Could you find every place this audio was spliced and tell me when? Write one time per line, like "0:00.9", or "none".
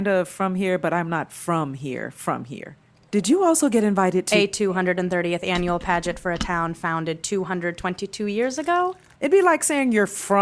0:03.1
0:09.1

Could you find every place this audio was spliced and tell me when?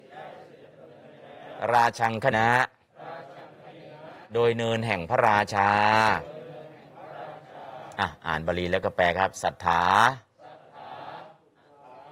0:02.3

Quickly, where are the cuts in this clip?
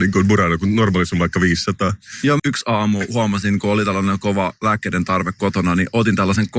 0:02.4

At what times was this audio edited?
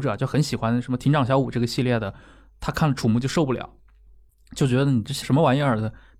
0:05.2

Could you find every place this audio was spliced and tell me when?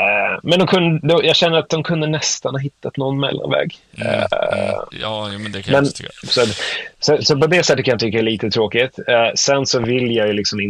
0:04.9
0:06.2

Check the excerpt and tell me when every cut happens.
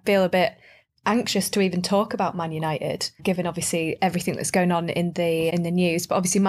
0:03.2
0:05.5

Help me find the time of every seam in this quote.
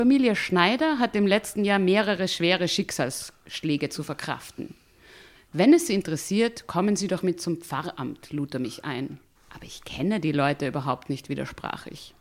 0:09.3

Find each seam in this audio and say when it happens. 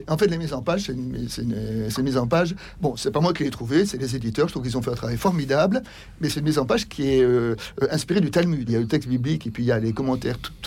0:08.7

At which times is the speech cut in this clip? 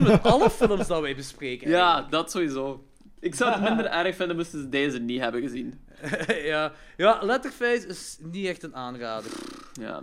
none

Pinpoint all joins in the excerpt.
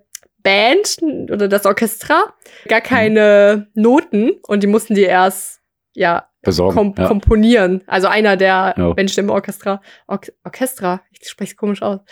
0:02.7

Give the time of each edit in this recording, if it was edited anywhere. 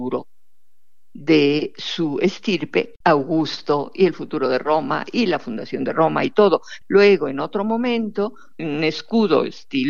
0:03.0
0:06.8
0:08.6

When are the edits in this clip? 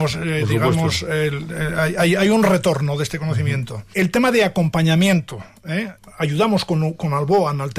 0:03.9
0:06.0

